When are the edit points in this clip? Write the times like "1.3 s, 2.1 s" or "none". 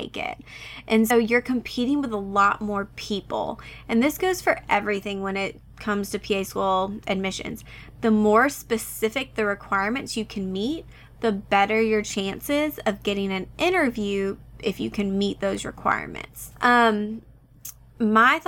1.1 s, 16.5 s

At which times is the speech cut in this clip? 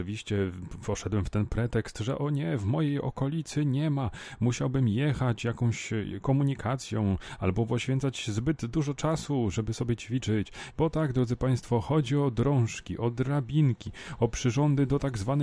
10.7 s

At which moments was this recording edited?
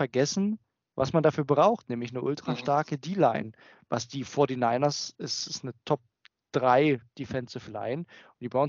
none

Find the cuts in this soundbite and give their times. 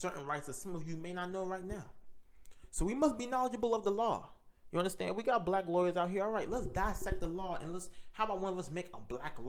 none

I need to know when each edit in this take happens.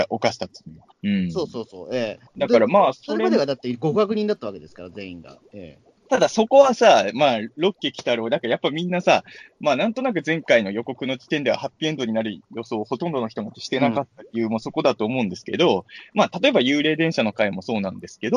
0.9 s, 2.3 s

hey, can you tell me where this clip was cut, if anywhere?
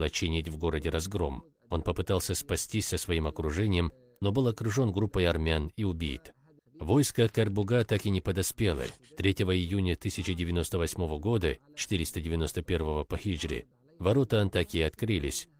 6.6 s

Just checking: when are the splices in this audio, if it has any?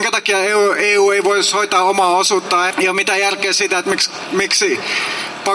2.7 s

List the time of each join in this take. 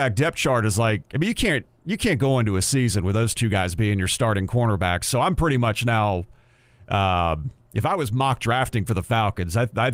none

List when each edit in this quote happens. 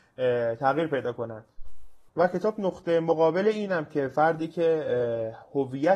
2.1 s

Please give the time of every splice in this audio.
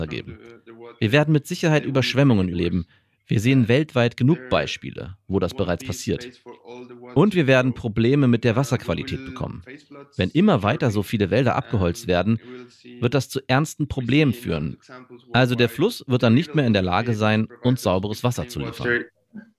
none

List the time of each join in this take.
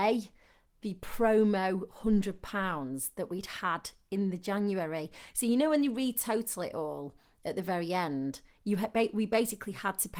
none

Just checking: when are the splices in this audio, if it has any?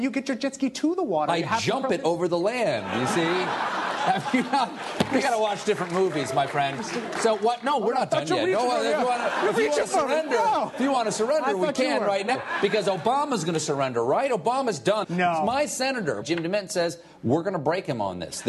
12.3 s, 15.0 s, 16.2 s

